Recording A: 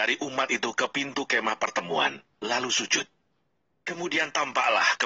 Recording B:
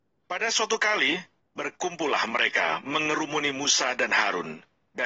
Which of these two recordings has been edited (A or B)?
B